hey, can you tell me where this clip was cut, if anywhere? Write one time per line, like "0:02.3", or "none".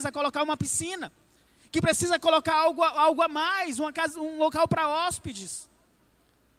none